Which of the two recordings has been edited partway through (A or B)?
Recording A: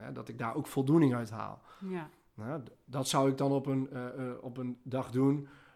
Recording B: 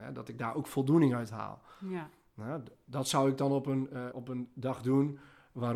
B